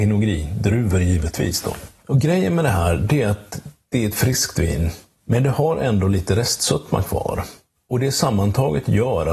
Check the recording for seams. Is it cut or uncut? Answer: uncut